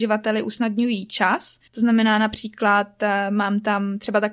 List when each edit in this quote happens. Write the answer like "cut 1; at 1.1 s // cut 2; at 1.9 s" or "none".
cut 1; at 1.7 s

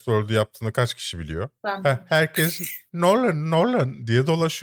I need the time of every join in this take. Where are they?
none

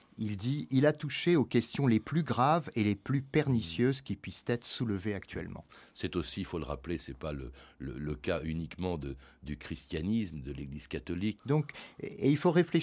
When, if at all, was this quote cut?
cut 1; at 11.4 s

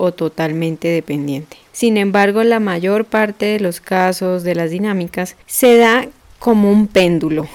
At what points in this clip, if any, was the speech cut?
cut 1; at 1.7 s // cut 2; at 5.4 s

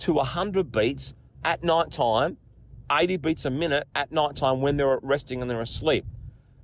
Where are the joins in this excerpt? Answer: cut 1; at 2.9 s

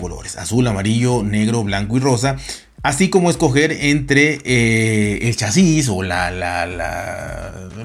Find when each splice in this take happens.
none

